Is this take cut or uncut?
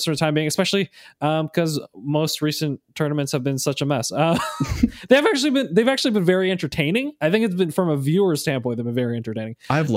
uncut